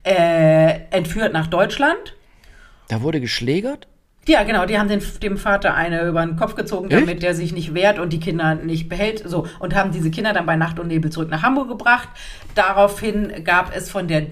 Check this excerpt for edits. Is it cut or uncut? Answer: uncut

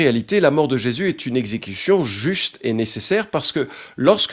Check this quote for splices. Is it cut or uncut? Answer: uncut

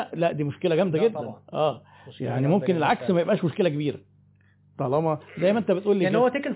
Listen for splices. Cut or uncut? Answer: uncut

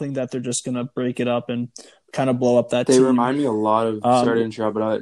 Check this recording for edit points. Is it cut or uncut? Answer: uncut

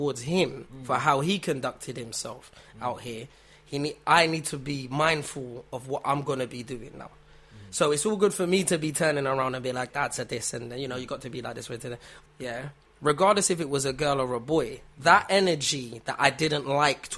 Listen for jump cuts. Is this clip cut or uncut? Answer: cut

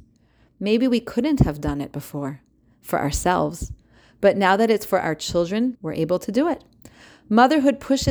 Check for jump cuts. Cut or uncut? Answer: cut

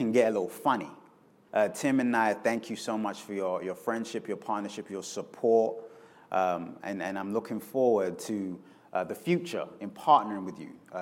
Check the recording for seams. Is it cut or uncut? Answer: cut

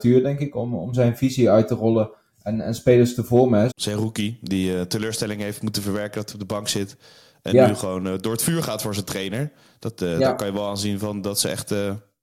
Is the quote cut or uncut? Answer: cut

